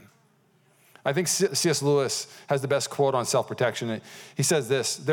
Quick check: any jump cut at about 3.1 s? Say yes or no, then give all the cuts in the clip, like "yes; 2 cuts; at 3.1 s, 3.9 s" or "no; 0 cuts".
no; 1 cut; at 1.5 s